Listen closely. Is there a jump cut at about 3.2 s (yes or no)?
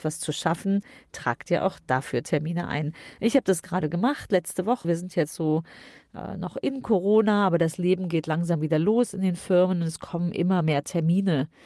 no